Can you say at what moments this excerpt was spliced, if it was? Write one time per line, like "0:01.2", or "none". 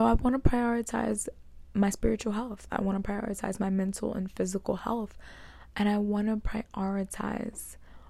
0:01.7